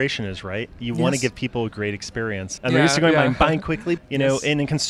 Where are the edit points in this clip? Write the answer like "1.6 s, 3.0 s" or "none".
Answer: 2.6 s, 4.0 s